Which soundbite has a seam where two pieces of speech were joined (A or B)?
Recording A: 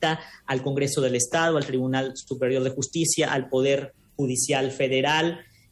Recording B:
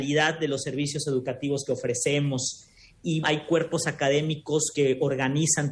B